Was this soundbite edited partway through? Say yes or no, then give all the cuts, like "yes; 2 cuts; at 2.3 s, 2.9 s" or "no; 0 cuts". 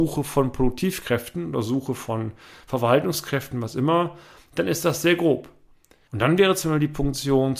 yes; 1 cut; at 6.1 s